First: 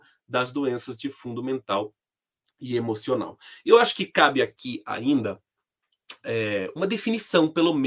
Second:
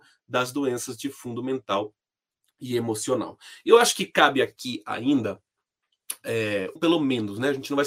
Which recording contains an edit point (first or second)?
second